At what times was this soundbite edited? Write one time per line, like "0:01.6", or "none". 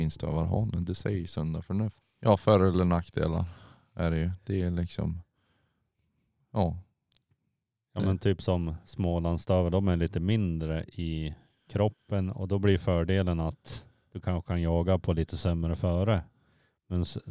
0:02.0